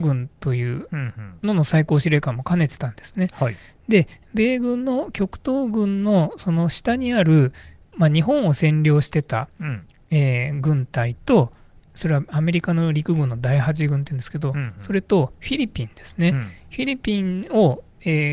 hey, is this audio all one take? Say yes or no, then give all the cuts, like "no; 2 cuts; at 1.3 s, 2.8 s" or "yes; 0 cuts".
yes; 0 cuts